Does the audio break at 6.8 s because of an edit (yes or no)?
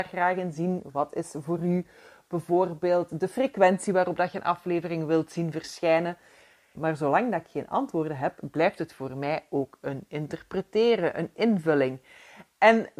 yes